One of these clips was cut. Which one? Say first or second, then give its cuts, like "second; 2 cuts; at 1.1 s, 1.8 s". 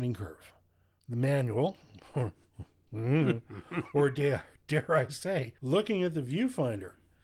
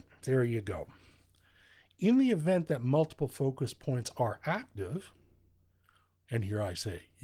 first; 2 cuts; at 0.9 s, 5.6 s